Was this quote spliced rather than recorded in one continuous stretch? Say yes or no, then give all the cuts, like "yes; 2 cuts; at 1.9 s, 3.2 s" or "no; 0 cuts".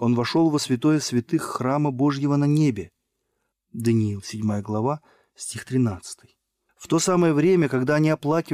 yes; 2 cuts; at 3.5 s, 6.7 s